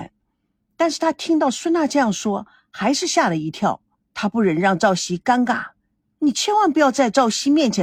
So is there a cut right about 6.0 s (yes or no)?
yes